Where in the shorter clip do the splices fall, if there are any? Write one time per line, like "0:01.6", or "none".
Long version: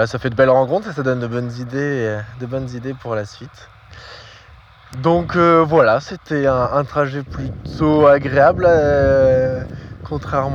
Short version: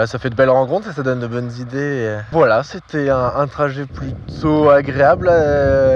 0:02.3